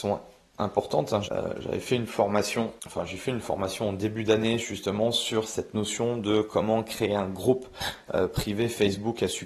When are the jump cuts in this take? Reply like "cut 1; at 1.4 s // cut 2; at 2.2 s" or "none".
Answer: cut 1; at 1.2 s // cut 2; at 2.8 s